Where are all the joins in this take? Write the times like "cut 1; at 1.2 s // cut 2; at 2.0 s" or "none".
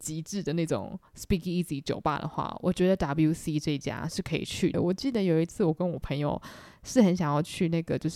cut 1; at 4.7 s